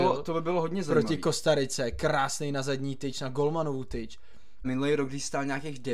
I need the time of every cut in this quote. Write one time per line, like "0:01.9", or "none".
0:04.6